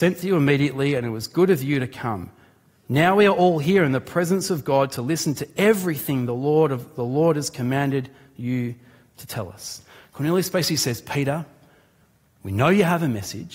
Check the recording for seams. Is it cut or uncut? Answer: uncut